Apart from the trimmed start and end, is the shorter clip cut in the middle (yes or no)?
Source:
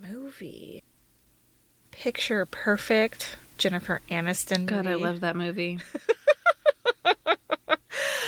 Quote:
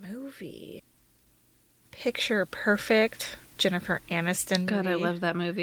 no